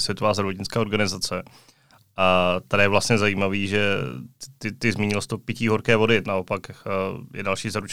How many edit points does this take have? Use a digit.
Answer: 1